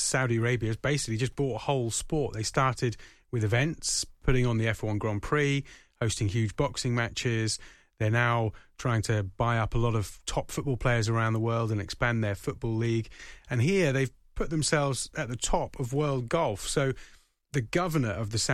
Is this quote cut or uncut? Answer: uncut